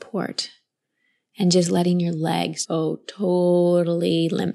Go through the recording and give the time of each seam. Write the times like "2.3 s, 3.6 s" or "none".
2.6 s

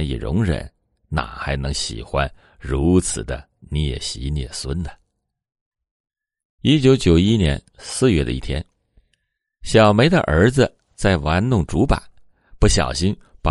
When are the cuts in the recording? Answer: none

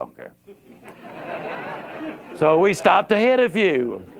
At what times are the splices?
none

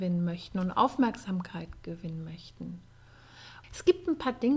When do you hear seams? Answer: 3.6 s

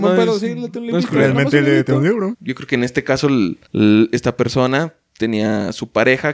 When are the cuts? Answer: 2.3 s, 3.6 s

